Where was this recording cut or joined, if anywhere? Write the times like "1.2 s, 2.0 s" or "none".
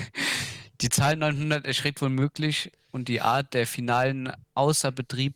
4.4 s